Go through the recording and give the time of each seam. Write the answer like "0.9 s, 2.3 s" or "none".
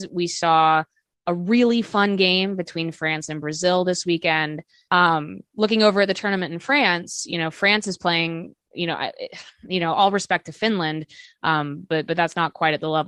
4.9 s